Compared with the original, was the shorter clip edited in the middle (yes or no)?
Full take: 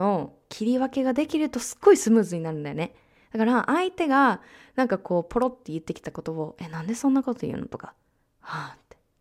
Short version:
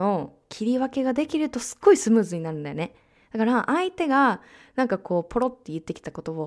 no